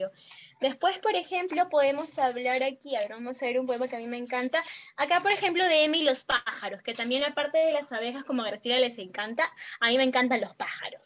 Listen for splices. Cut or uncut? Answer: uncut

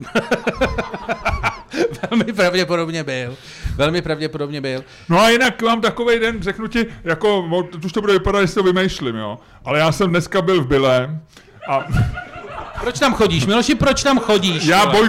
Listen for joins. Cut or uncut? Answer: uncut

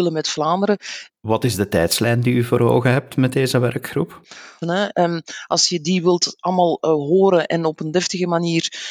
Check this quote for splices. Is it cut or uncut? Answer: cut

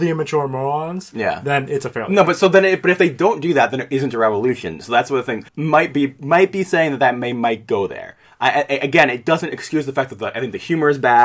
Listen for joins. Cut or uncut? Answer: cut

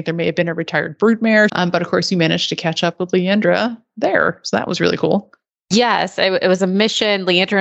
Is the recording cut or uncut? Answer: cut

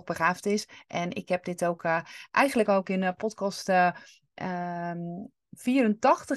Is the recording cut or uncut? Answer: uncut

